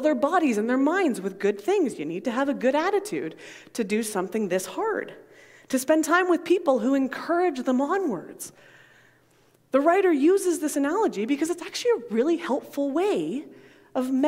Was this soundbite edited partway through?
no; 0 cuts

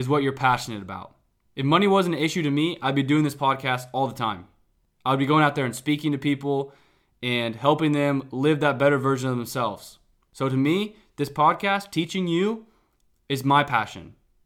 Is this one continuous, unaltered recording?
yes; 0 cuts

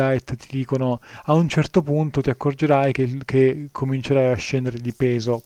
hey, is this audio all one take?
yes; 0 cuts

